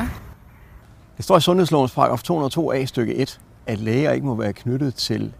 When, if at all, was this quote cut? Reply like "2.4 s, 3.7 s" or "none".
none